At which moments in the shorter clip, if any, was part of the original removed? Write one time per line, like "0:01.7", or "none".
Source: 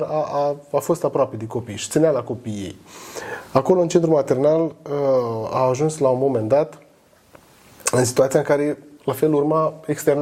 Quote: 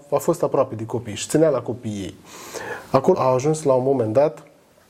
0:03.1